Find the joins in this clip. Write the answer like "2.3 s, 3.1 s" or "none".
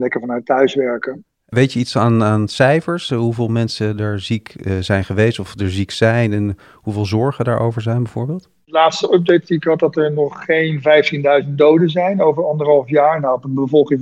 1.2 s